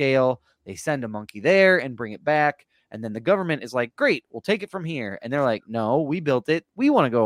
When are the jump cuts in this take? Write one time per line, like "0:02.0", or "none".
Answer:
none

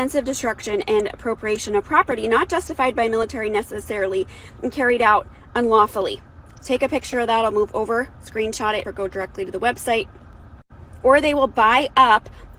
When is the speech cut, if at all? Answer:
0:08.8
0:11.0

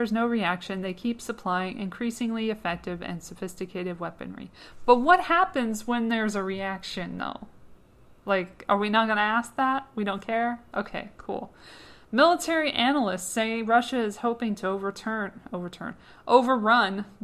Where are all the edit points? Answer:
none

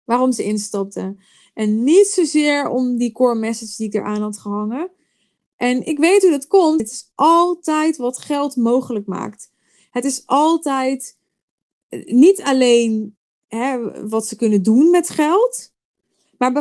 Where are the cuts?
0:06.8

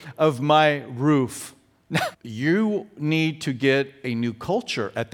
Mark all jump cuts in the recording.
0:02.1

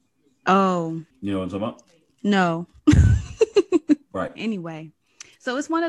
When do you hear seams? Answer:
0:01.1
0:04.4

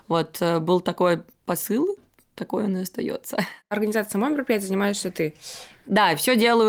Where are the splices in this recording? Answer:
none

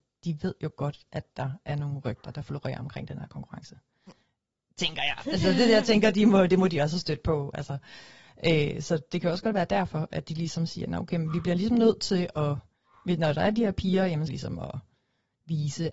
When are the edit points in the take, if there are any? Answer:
0:14.3

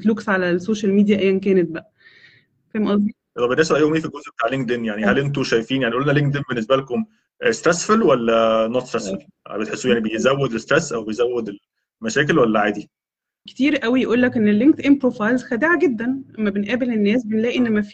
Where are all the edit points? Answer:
0:13.5

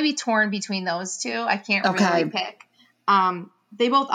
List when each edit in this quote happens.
none

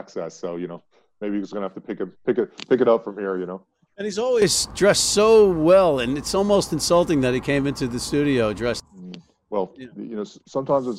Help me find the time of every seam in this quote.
none

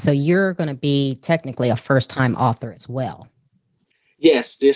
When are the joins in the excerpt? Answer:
none

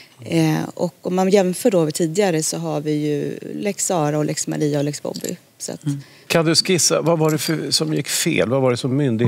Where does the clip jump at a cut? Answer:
0:06.3

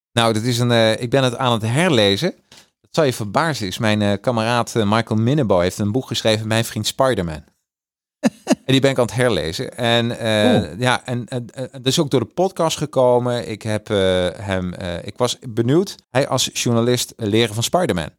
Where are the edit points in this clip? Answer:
0:16.0
0:17.2

